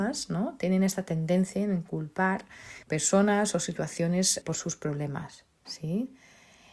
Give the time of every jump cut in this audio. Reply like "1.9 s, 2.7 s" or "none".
2.8 s, 4.4 s, 5.5 s